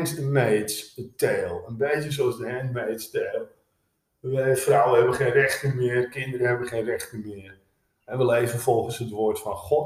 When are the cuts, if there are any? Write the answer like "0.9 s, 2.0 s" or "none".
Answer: none